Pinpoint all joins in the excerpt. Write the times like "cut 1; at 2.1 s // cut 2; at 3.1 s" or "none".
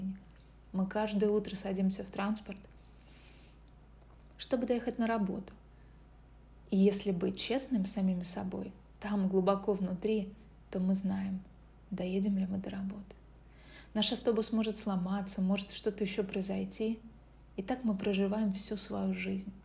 none